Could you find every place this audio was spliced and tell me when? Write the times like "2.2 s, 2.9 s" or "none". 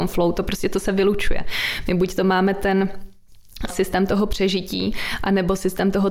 3.7 s